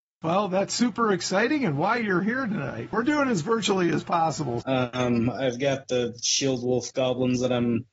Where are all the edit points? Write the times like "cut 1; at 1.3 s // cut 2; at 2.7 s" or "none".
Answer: cut 1; at 2.9 s // cut 2; at 4.6 s

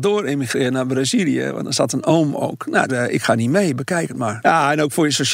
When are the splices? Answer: cut 1; at 2.9 s // cut 2; at 4.4 s

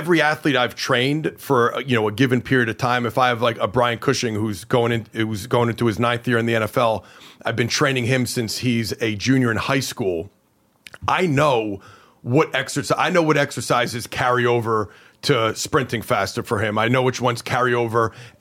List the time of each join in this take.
none

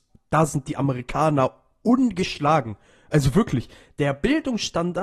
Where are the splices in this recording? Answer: none

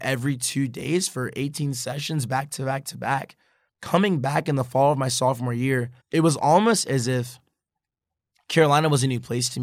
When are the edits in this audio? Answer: cut 1; at 3.7 s // cut 2; at 6.0 s

